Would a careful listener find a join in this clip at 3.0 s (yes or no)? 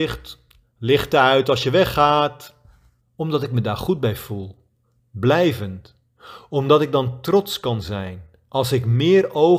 yes